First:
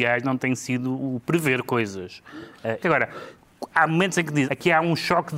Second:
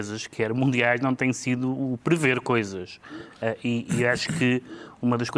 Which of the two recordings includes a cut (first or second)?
first